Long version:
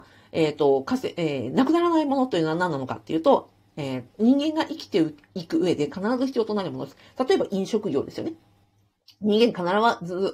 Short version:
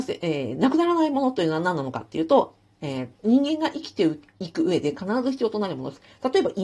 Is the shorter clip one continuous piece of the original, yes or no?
yes